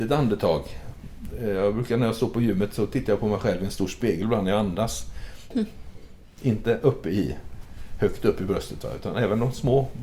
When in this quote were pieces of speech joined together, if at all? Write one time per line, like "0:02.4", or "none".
0:05.5

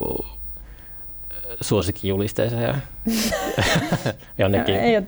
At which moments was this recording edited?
none

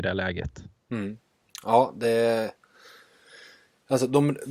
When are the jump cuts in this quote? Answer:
none

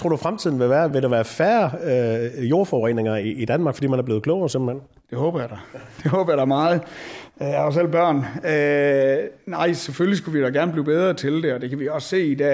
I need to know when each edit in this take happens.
none

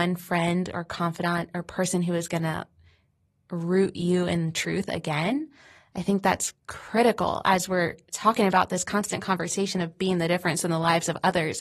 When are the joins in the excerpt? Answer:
none

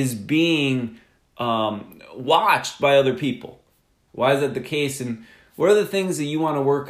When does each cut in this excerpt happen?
0:04.1

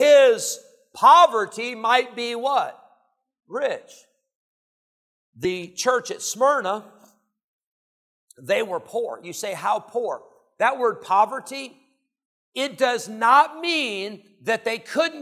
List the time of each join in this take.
none

